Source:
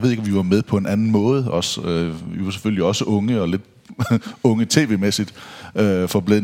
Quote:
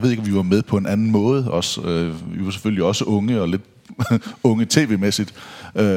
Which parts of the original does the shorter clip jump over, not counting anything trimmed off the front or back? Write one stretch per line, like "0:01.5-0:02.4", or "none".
none

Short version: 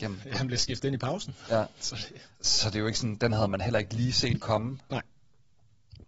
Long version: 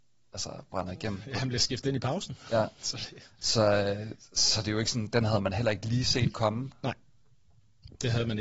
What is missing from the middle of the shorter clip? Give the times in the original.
0:03.4-0:04.3

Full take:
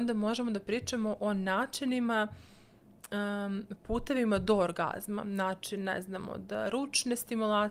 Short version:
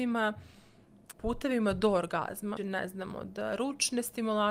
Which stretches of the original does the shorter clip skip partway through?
0:03.1-0:03.8
0:05.2-0:05.7

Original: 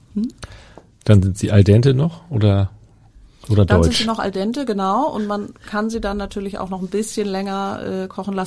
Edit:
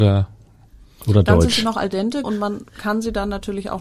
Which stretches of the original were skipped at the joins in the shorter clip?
0:04.7-0:05.1

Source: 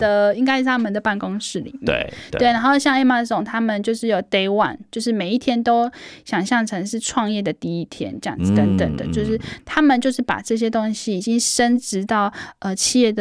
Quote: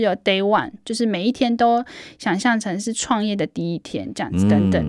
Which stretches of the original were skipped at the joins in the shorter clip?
none

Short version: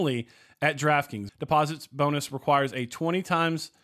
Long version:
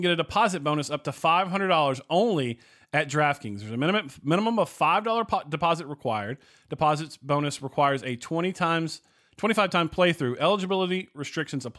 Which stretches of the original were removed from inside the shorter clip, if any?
0:03.6-0:06.6

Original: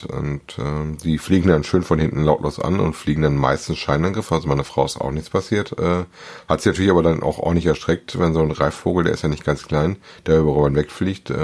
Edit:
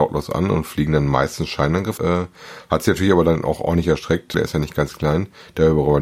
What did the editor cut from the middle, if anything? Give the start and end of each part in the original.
0:04.3-0:05.8
0:08.1-0:09.0

